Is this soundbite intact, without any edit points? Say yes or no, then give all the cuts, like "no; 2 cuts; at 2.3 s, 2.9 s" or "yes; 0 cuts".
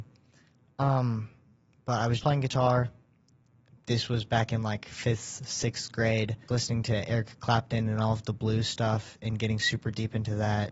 no; 2 cuts; at 2.2 s, 6.5 s